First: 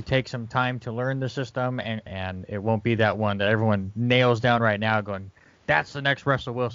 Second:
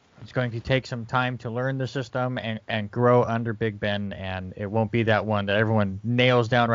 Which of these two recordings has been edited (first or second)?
first